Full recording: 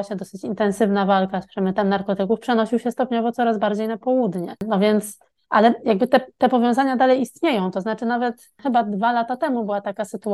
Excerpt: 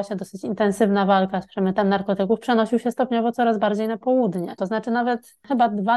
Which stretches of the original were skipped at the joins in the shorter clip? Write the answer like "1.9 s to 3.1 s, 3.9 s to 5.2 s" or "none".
4.6 s to 7.7 s